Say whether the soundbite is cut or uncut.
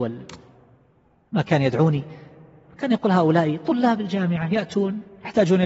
uncut